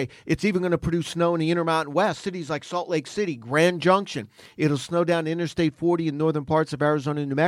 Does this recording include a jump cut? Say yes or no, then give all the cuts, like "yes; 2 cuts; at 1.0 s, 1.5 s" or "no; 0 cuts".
no; 0 cuts